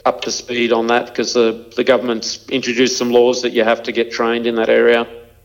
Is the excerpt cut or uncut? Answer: uncut